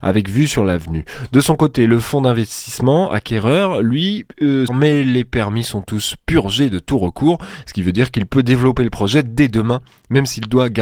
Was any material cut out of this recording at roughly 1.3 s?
no; 1 cut; at 4.7 s

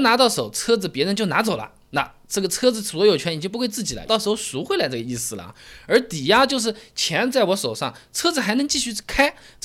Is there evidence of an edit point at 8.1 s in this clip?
no; 2 cuts; at 1.8 s, 4.1 s

